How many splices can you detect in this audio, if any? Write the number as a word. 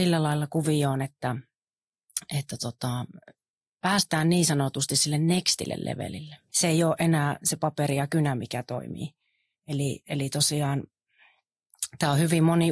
one